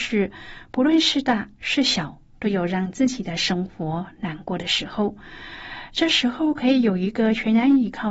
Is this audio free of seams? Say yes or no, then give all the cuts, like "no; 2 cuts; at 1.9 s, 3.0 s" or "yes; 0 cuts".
yes; 0 cuts